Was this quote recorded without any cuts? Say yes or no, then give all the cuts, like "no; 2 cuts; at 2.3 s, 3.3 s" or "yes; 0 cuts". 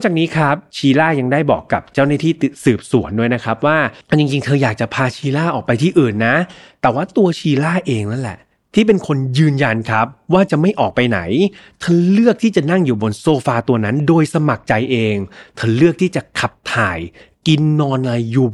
yes; 0 cuts